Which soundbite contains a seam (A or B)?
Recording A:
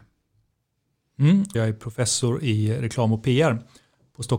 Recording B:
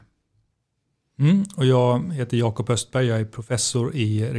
A